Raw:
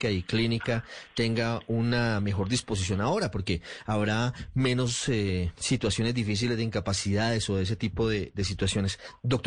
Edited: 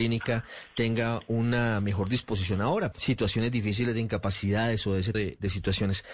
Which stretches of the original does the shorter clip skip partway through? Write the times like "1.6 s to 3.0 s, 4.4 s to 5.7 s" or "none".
3.3 s to 5.5 s, 7.8 s to 8.1 s

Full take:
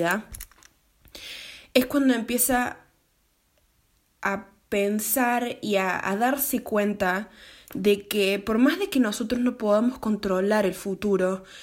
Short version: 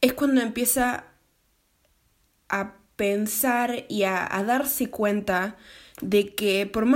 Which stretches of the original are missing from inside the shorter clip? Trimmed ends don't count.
none

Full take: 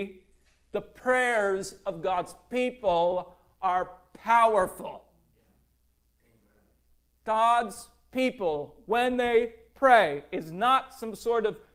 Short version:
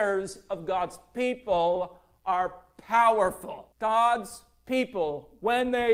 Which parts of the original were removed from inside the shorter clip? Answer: 5.1 s to 7.2 s

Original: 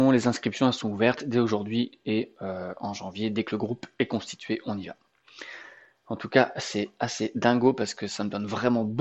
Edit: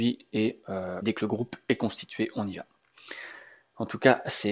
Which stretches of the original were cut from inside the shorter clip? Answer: 2.7 s to 3.3 s

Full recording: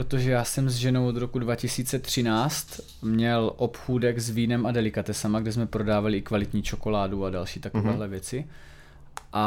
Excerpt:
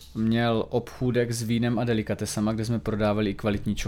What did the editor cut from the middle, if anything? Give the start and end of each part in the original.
none

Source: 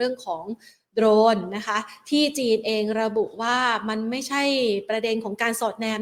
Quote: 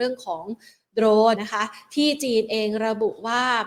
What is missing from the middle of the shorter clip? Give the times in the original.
1.3 s to 1.5 s

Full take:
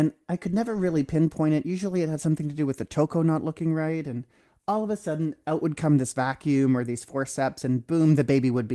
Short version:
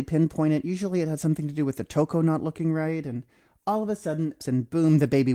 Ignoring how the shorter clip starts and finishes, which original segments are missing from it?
5.4 s to 7.6 s

